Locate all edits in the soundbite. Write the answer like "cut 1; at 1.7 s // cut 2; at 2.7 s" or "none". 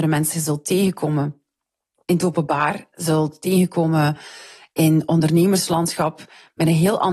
cut 1; at 2.0 s